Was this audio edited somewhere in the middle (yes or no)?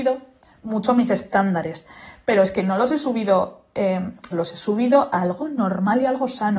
yes